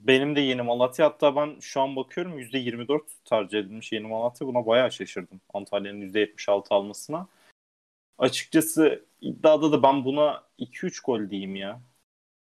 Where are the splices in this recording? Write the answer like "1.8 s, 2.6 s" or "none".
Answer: none